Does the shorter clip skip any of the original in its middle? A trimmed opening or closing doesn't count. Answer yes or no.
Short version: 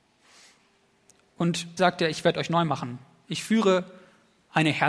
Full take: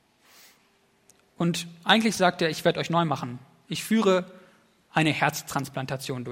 yes